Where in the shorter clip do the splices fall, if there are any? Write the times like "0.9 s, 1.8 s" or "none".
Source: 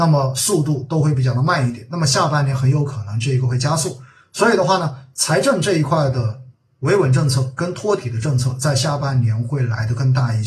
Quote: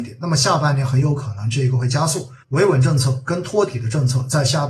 2.4 s